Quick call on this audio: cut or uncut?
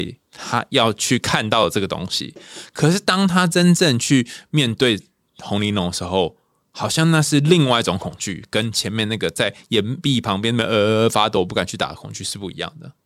uncut